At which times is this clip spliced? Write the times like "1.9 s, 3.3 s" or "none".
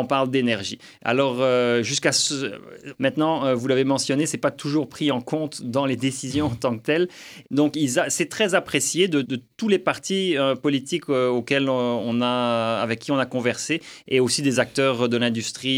2.9 s, 7.4 s, 9.2 s